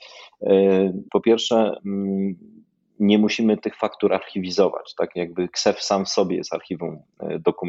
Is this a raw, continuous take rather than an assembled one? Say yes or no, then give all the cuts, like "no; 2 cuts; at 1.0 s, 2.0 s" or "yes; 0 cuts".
no; 1 cut; at 1.1 s